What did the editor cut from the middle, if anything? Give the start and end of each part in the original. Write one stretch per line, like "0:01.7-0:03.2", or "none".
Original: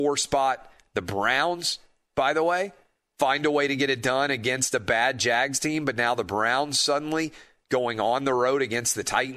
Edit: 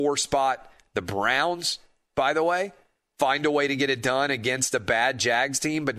none